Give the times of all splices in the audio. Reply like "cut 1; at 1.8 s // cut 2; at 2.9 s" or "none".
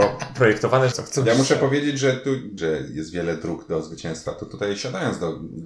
cut 1; at 0.9 s // cut 2; at 2.6 s